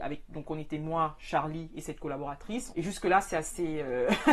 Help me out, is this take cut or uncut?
cut